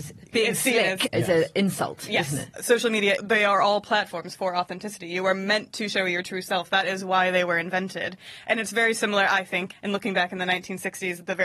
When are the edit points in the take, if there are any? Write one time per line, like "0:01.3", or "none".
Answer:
0:02.5